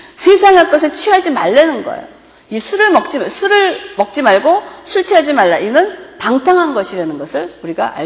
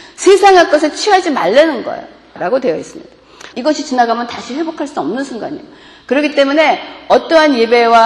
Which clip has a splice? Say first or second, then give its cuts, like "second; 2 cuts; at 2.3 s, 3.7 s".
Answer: second; 2 cuts; at 2.4 s, 3.5 s